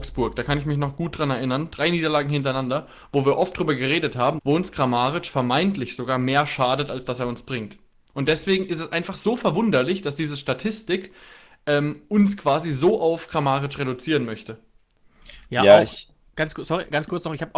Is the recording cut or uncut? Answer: cut